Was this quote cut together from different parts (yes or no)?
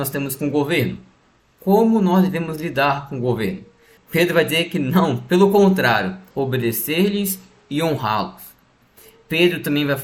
yes